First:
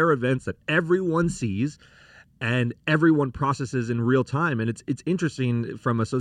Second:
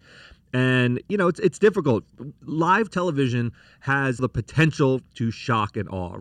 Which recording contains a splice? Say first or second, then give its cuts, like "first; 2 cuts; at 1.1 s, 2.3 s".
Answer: second; 1 cut; at 4.2 s